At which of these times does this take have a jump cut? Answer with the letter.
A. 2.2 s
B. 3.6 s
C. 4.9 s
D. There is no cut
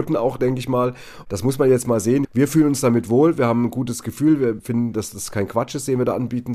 A